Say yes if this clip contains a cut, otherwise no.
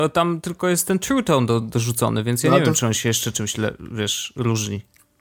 no